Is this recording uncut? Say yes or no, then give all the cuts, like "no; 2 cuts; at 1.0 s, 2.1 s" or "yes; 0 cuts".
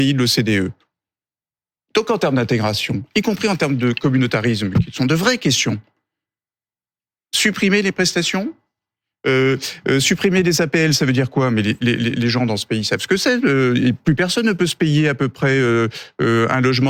yes; 0 cuts